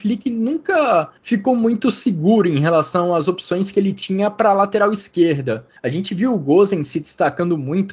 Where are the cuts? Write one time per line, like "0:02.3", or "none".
0:01.2
0:05.8